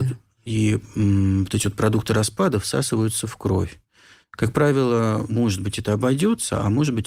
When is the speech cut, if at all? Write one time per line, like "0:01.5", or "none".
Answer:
0:05.3